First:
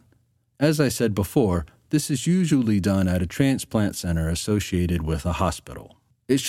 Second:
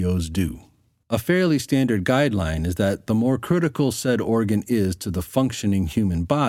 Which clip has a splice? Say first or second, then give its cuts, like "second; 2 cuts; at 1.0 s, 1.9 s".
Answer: second; 1 cut; at 1.0 s